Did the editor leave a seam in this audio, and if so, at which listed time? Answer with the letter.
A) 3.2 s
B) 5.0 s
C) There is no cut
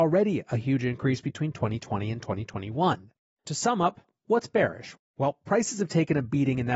A